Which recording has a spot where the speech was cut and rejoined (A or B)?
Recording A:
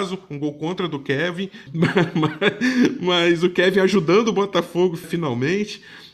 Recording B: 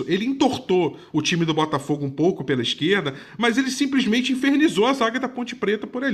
A